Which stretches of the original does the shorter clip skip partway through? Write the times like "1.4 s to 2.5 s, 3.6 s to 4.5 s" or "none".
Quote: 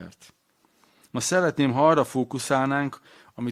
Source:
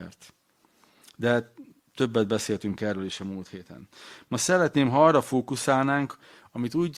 1.0 s to 4.2 s